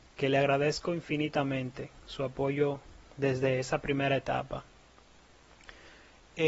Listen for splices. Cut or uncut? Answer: uncut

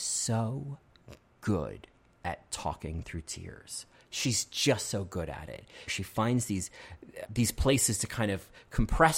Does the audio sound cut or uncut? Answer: cut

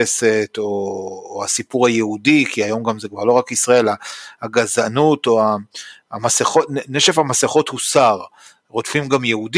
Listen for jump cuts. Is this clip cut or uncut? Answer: uncut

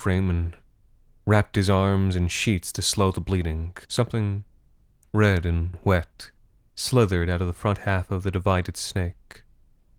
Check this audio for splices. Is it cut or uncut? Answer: cut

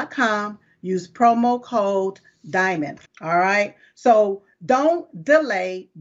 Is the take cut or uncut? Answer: cut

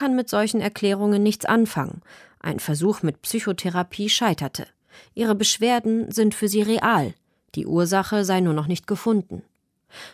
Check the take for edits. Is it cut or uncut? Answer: uncut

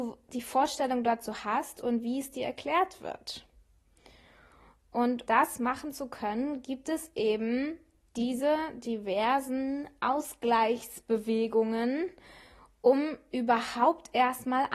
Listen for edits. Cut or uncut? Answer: cut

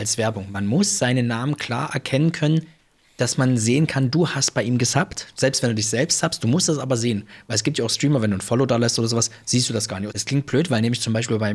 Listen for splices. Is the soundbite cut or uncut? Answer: cut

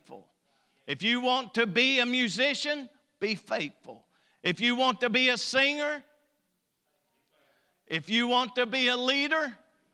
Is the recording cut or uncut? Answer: uncut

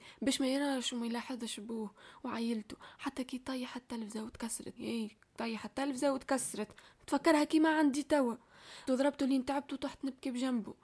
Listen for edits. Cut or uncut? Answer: cut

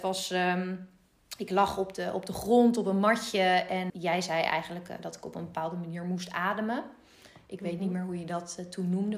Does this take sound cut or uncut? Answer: cut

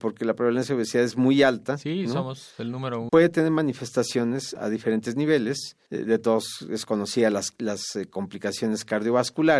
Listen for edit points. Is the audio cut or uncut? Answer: cut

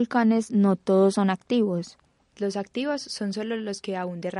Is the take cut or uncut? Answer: cut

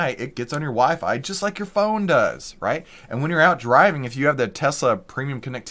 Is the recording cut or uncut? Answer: uncut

